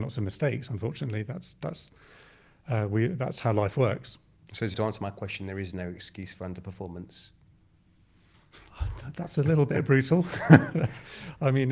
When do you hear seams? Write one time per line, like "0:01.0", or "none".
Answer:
0:04.7